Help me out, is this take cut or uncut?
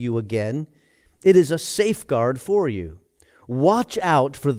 uncut